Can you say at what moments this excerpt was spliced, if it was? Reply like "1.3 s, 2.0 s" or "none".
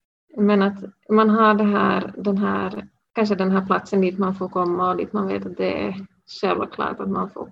none